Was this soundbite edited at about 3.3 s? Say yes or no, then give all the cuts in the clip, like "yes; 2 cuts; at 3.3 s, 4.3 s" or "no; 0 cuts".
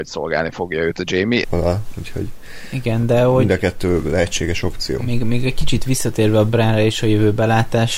no; 1 cut; at 1.4 s